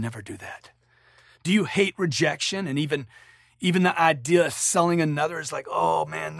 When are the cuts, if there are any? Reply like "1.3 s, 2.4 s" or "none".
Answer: none